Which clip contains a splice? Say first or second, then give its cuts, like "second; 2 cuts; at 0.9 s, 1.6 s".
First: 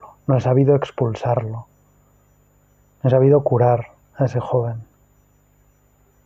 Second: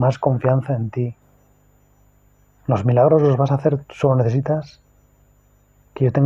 second; 1 cut; at 3.8 s